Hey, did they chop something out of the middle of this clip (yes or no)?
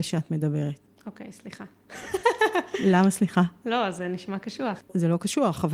no